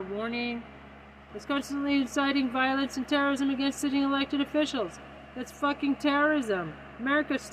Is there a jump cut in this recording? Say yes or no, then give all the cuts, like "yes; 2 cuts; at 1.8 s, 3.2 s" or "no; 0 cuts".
yes; 1 cut; at 1.3 s